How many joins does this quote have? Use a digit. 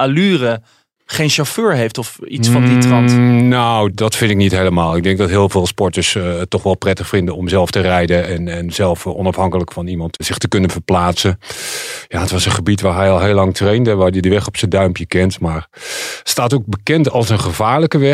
0